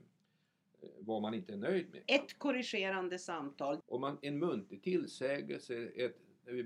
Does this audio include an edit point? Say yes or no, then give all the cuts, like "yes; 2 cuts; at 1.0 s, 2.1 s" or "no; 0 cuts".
yes; 2 cuts; at 2.0 s, 3.8 s